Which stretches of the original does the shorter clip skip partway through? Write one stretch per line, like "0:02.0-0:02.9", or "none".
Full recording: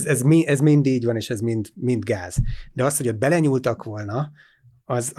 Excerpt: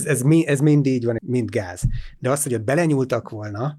0:01.2-0:01.7